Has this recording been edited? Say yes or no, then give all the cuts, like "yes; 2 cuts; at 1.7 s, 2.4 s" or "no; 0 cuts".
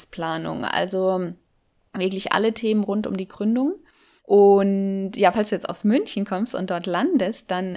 no; 0 cuts